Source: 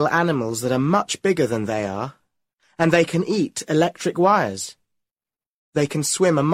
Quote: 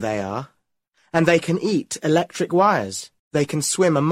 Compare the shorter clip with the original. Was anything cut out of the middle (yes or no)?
yes